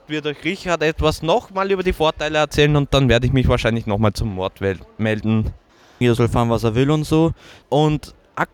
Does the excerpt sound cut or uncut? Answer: cut